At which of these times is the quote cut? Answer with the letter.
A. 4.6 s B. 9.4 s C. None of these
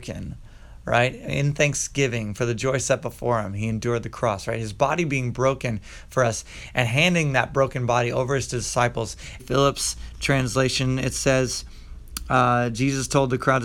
B